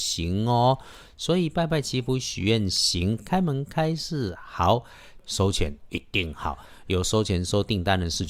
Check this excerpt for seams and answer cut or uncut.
cut